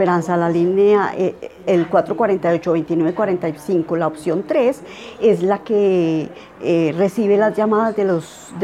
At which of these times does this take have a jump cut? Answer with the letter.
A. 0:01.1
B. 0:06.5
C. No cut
C